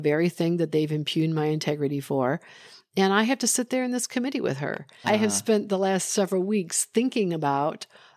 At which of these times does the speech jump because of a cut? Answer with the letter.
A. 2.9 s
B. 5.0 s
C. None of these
B